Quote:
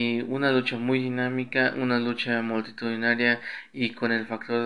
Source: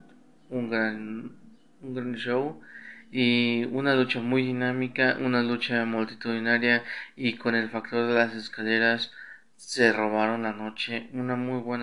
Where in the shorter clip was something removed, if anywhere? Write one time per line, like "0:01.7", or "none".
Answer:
none